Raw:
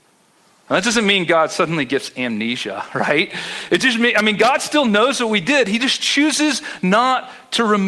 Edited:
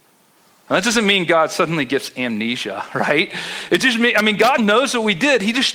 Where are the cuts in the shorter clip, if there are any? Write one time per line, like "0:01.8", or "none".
0:04.6